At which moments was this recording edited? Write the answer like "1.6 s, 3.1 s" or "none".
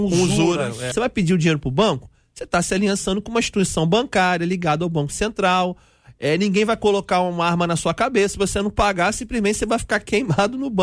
0.9 s